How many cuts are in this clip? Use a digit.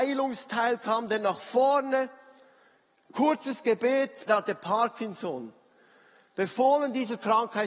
1